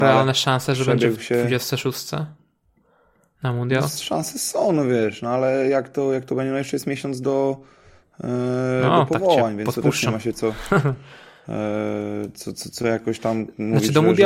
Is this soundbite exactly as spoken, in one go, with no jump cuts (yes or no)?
yes